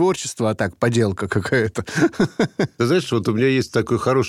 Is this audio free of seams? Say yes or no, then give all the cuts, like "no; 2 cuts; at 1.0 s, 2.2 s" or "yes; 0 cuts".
yes; 0 cuts